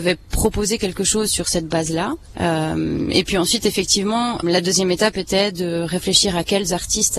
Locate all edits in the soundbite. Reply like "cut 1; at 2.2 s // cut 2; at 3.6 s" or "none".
cut 1; at 2.3 s // cut 2; at 4.4 s